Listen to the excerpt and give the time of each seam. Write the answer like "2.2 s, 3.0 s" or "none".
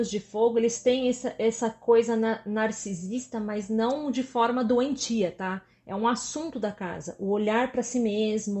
none